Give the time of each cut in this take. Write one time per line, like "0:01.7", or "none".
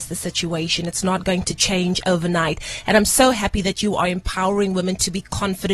none